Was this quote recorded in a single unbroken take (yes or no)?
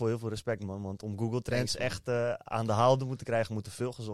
yes